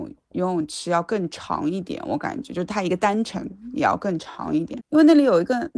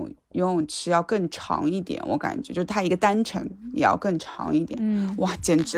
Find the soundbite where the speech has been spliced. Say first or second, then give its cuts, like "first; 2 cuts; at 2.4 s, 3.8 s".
first; 1 cut; at 4.8 s